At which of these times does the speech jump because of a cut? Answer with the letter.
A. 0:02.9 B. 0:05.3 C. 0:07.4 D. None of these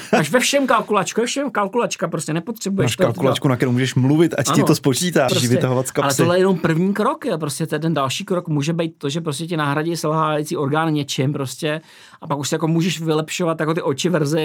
B